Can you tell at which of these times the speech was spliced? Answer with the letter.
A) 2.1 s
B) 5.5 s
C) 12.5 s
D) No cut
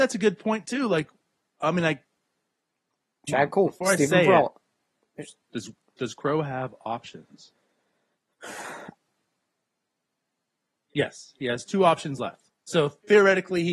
C